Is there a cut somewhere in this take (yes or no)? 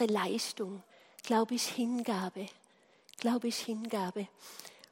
no